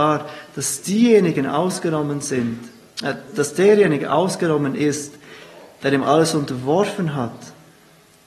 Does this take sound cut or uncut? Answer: cut